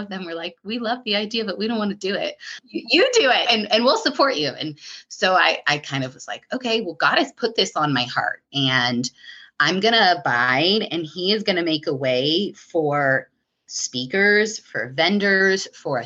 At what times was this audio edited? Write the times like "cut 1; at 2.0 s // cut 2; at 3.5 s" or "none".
cut 1; at 3.5 s